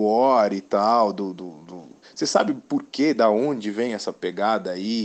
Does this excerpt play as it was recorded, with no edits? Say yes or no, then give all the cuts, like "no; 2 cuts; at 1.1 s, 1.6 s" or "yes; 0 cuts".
no; 1 cut; at 2.0 s